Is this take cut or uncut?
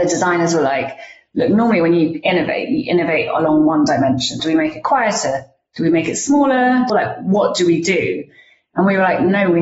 cut